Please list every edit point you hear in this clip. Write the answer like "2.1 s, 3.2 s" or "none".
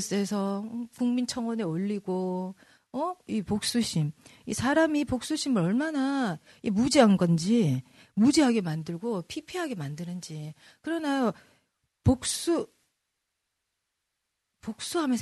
3.3 s